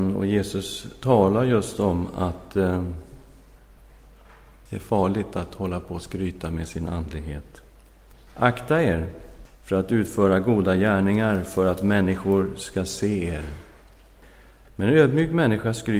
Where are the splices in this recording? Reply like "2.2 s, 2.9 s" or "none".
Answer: 8.3 s, 14.6 s